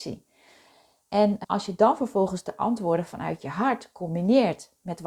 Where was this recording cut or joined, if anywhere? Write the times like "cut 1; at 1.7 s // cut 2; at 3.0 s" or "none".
cut 1; at 1.4 s